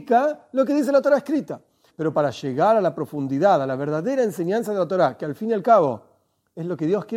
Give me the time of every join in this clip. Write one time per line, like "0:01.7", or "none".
0:01.9